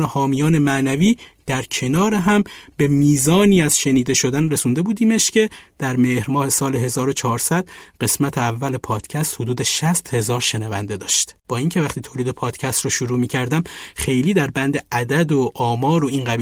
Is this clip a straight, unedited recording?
no; 1 cut; at 11.4 s

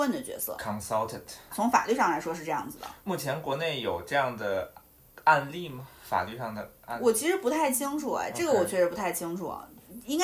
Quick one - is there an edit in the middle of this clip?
yes; 1 cut; at 1.5 s

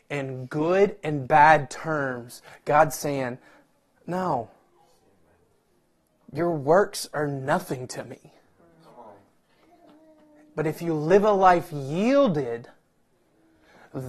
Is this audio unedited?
yes; 0 cuts

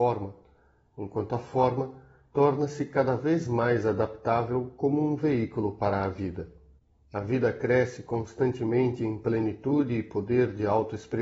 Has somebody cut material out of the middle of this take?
yes; 1 cut; at 7.0 s

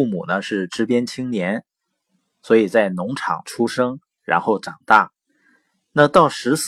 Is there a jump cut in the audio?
no; 0 cuts

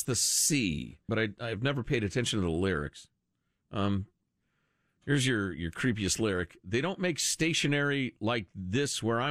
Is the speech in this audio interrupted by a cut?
yes; 1 cut; at 1.1 s

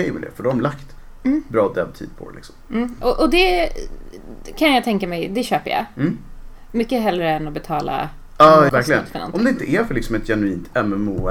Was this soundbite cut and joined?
yes; 1 cut; at 8.7 s

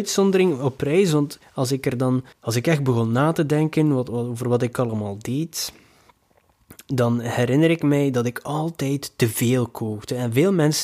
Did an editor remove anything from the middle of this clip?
yes; 1 cut; at 2.3 s

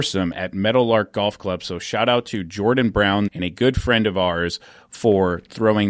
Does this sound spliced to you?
yes; 1 cut; at 3.3 s

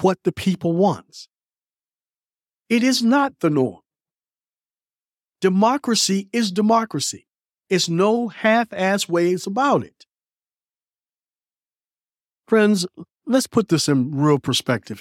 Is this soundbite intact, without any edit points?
no; 1 cut; at 2.5 s

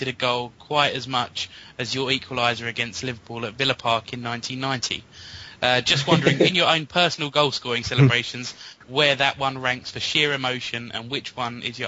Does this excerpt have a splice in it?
no; 0 cuts

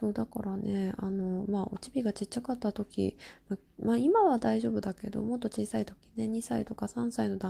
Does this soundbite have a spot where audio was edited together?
no; 0 cuts

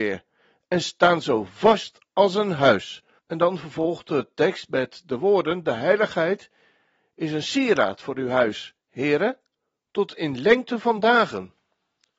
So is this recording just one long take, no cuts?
no; 1 cut; at 3.2 s

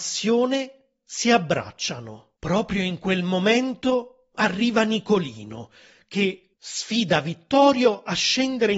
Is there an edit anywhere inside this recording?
yes; 2 cuts; at 2.4 s, 6.5 s

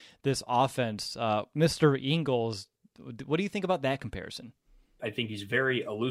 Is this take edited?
yes; 1 cut; at 5.0 s

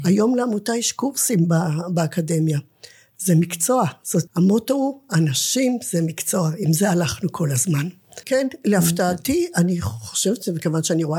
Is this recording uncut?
no; 2 cuts; at 4.3 s, 8.2 s

